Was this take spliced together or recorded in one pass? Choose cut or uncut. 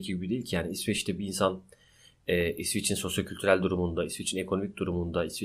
uncut